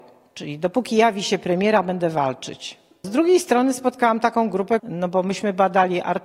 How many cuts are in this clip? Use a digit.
2